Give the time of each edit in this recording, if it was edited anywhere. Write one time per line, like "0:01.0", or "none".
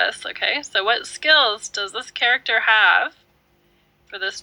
none